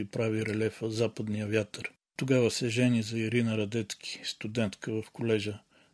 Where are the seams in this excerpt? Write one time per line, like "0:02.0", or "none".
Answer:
none